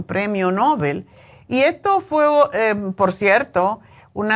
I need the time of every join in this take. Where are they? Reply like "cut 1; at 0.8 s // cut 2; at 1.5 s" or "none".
cut 1; at 1.4 s